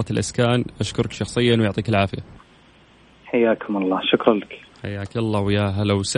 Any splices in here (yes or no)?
no